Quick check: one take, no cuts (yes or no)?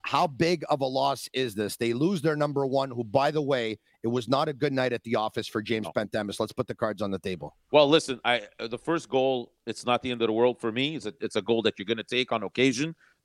yes